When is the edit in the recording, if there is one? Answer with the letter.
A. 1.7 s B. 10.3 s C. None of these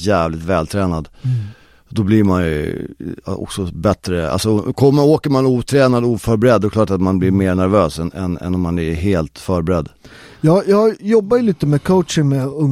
C